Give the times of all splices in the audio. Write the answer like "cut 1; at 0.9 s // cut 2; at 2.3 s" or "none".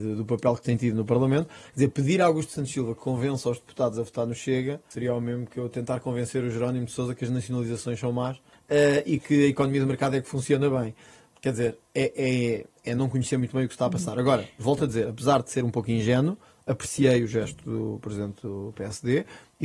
none